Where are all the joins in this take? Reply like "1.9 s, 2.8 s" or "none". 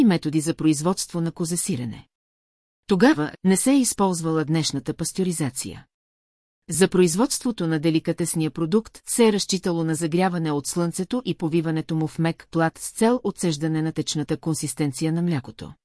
3.3 s